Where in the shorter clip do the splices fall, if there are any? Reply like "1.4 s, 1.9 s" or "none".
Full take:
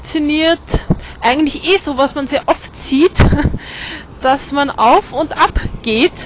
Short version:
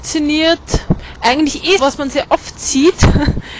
1.8 s